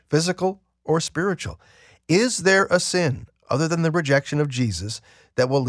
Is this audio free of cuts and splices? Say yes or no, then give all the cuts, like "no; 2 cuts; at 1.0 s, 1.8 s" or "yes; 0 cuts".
yes; 0 cuts